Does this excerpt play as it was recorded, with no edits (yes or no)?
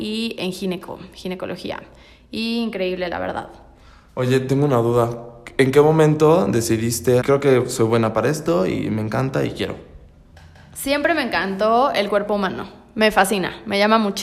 no